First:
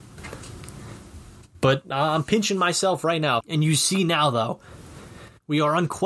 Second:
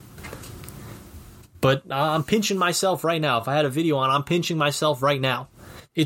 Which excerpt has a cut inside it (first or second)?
first